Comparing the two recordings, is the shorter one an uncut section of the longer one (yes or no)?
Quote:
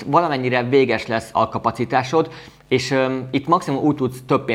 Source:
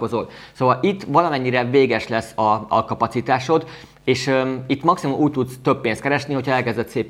no